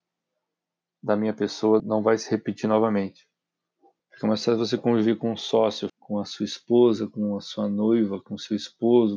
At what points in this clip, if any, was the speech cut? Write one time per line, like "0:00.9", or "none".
0:01.8
0:04.0
0:05.9